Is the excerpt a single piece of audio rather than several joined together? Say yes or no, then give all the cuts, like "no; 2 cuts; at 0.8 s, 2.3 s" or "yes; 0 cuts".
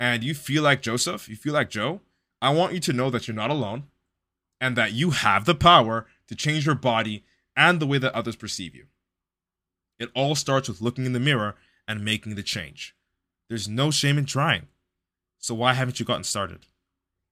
yes; 0 cuts